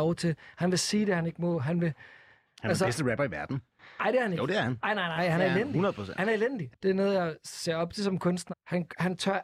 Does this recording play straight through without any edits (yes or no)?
no